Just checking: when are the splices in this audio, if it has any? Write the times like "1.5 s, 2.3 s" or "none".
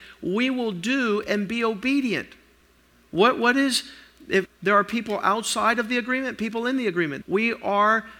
4.5 s, 7.2 s